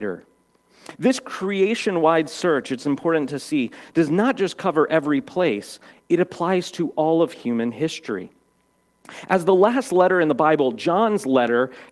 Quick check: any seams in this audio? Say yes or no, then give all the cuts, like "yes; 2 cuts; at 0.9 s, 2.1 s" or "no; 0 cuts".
yes; 1 cut; at 5.9 s